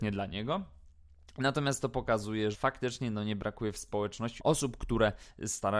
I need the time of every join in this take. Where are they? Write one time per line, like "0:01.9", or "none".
0:02.5
0:04.4